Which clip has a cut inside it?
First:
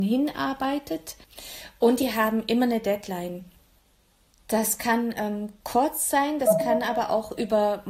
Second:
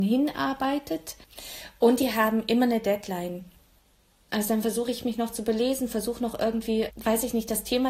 second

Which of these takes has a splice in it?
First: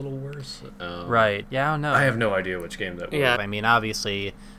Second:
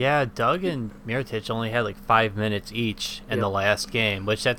first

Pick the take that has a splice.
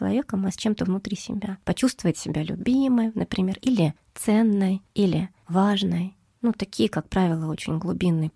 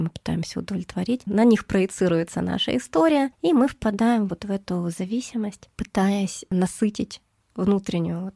second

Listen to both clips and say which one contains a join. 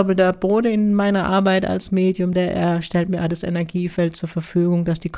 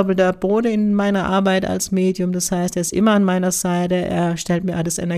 first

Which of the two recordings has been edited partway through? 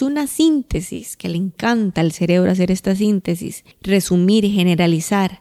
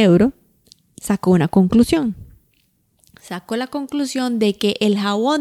first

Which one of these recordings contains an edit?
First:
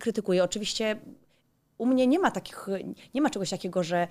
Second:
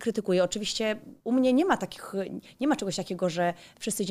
second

